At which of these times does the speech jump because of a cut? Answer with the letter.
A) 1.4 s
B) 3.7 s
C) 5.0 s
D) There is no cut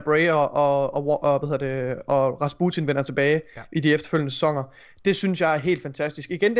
D